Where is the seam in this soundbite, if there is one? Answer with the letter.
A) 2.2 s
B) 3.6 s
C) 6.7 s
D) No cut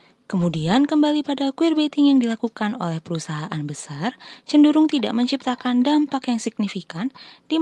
D